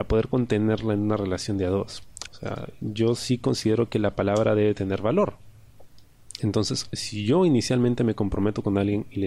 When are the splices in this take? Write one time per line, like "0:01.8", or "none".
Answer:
0:02.3